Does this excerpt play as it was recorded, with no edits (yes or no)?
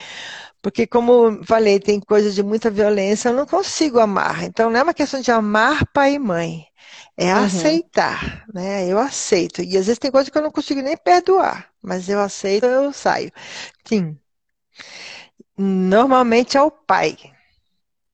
no